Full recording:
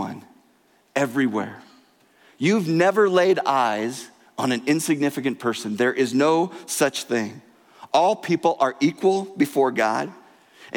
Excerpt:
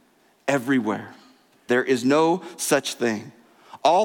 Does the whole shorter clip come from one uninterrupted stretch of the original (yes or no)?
no